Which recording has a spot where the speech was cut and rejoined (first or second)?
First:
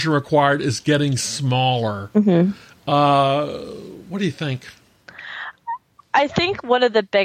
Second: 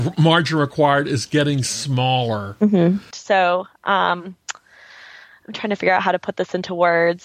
second